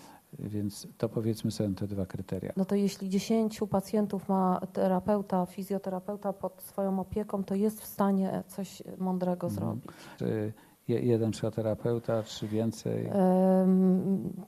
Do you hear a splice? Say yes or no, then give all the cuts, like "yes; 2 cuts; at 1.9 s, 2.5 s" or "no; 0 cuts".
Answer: yes; 2 cuts; at 2.5 s, 10.2 s